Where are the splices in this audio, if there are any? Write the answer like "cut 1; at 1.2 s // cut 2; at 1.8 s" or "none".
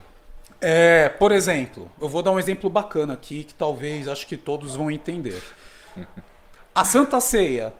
cut 1; at 2.0 s

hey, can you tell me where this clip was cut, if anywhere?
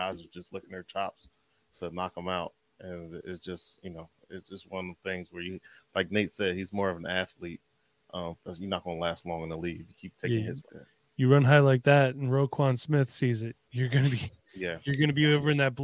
cut 1; at 8.4 s // cut 2; at 10.7 s

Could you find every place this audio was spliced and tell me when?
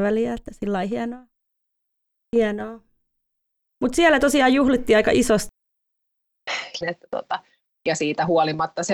cut 1; at 6.8 s

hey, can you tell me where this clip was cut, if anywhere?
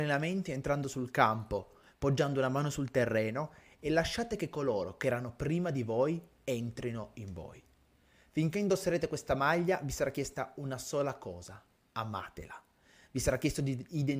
none

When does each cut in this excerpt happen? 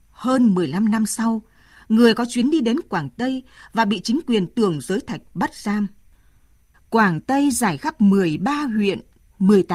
cut 1; at 6.7 s

